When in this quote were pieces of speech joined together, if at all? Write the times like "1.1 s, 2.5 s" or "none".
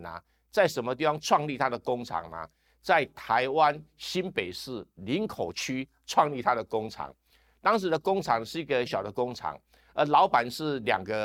8.9 s